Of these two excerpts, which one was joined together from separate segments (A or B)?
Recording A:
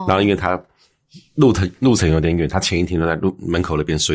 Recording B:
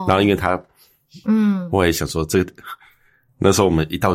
B